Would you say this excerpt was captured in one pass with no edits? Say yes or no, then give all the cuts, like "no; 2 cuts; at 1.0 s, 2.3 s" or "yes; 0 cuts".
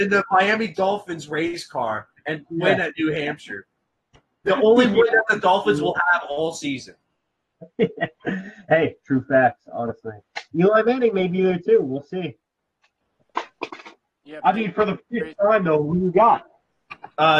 yes; 0 cuts